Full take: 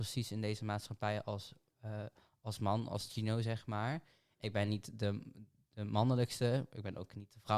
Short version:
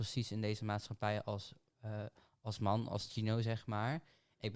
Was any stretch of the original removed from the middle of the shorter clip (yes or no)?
no